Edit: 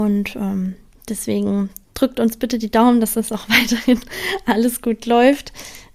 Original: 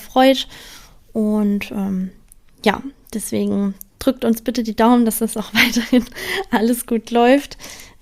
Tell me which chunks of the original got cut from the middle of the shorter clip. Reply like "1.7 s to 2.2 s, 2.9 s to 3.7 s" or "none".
2.3 s to 3.0 s